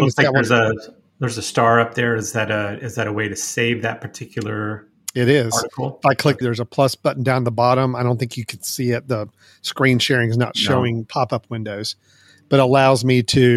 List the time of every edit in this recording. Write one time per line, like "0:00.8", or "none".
0:06.4